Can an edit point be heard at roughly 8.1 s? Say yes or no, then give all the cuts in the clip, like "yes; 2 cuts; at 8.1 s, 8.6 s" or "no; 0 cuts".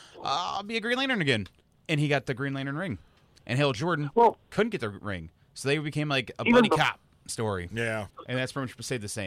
yes; 1 cut; at 8.1 s